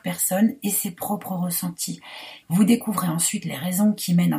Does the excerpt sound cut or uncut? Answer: cut